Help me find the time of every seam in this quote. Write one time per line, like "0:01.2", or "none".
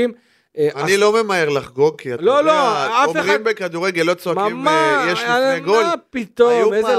none